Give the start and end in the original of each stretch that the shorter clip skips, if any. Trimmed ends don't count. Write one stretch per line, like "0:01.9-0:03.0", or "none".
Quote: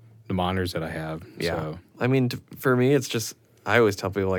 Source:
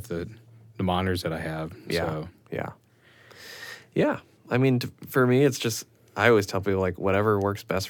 0:02.4-0:04.4